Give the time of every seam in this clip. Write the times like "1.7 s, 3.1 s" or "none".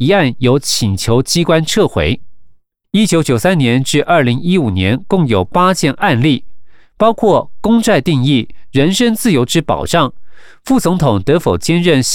2.8 s